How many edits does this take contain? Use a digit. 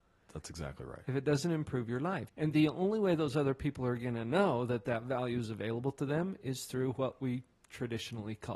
1